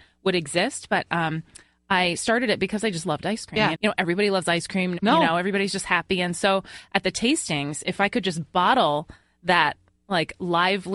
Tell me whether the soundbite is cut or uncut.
cut